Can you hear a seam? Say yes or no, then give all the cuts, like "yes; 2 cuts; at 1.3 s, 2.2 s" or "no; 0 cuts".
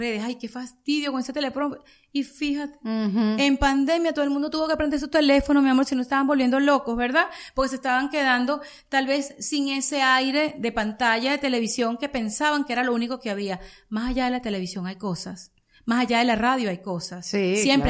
no; 0 cuts